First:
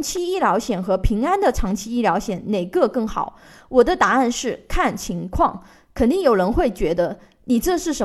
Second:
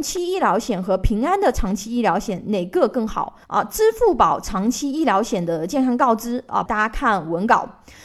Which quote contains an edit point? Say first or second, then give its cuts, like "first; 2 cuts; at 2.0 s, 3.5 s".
second; 2 cuts; at 3.4 s, 6.7 s